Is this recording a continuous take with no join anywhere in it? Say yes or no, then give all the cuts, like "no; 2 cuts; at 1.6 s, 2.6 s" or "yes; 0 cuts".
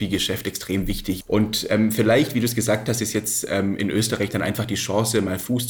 no; 1 cut; at 1.2 s